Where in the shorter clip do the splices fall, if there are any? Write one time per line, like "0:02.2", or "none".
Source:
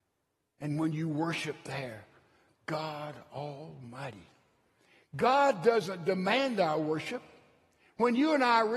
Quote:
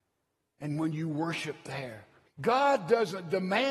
0:02.3